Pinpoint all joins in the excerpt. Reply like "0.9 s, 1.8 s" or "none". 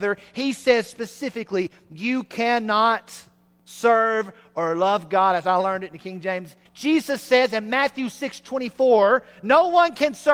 6.7 s